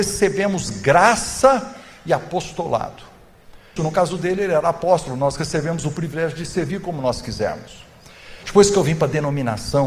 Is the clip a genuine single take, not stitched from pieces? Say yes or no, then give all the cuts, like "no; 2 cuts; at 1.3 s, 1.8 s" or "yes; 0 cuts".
no; 2 cuts; at 3.8 s, 8.4 s